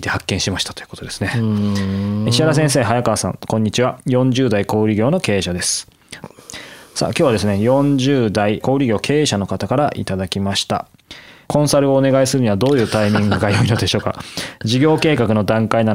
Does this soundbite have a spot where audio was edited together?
yes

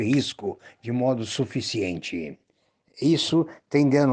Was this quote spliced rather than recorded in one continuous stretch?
no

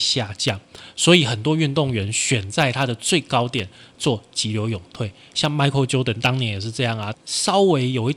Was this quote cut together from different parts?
yes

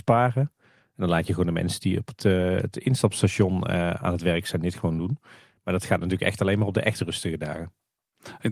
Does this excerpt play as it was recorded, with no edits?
yes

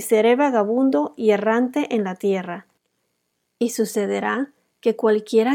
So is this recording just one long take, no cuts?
yes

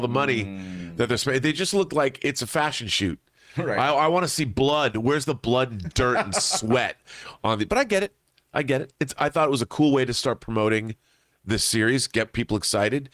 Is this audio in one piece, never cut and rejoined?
yes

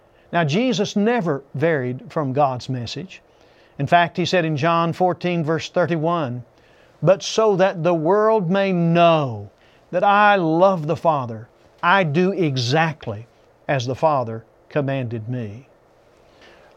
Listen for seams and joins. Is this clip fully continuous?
yes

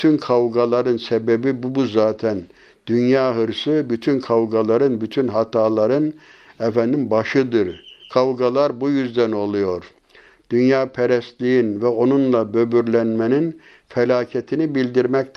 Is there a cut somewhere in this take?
yes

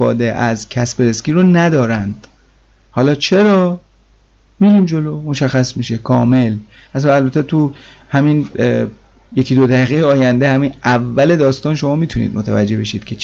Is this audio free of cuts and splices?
yes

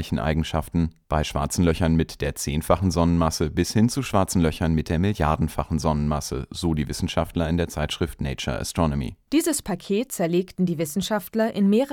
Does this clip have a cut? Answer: yes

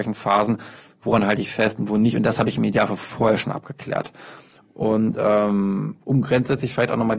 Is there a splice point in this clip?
no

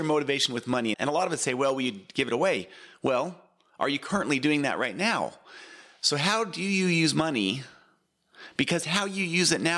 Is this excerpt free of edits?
no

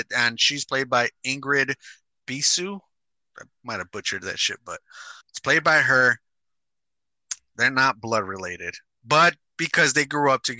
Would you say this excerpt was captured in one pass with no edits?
no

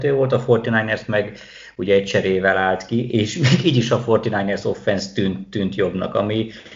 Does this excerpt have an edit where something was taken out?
no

